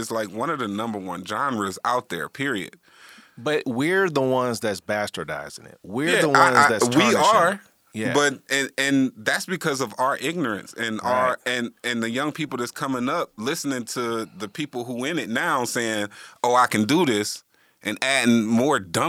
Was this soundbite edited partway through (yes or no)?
no